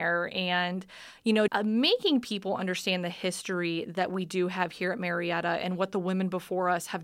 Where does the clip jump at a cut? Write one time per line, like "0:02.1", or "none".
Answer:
0:01.5